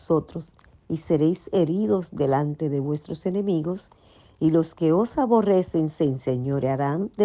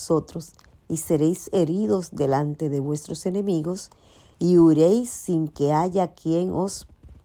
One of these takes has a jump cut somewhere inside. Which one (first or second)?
second